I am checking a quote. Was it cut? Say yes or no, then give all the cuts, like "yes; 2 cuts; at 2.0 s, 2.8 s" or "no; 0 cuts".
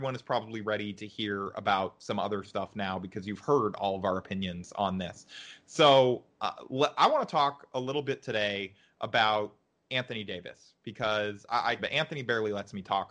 yes; 1 cut; at 11.8 s